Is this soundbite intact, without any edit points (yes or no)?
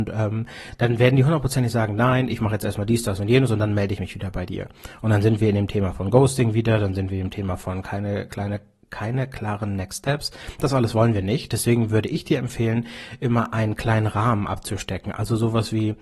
yes